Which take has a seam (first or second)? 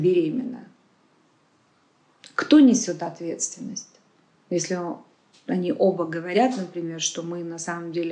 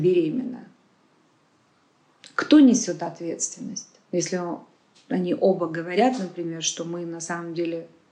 second